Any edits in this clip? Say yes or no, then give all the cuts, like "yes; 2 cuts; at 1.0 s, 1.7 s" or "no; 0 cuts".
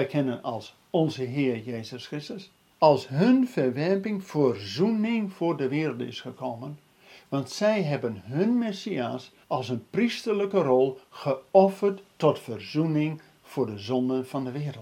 yes; 2 cuts; at 2.7 s, 9.4 s